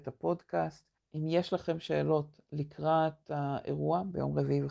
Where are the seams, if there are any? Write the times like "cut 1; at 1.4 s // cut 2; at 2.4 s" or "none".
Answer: cut 1; at 1.1 s